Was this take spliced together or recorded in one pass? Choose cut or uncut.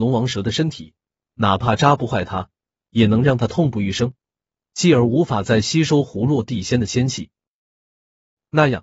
uncut